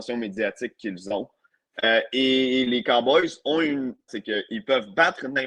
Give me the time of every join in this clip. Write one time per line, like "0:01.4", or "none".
0:04.1